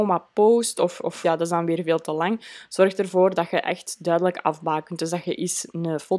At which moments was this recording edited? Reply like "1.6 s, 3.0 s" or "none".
1.2 s

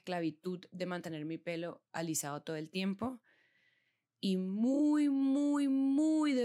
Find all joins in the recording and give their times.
none

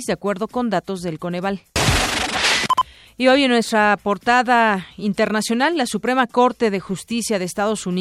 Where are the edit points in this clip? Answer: none

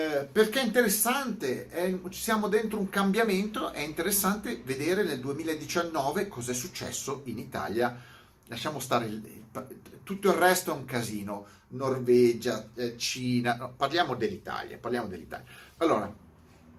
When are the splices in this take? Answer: 15.8 s

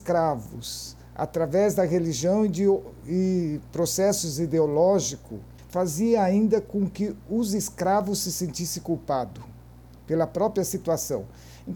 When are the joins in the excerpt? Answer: none

